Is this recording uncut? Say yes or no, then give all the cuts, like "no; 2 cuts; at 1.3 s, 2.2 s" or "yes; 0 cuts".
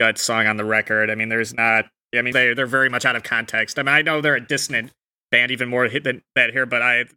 no; 1 cut; at 2.3 s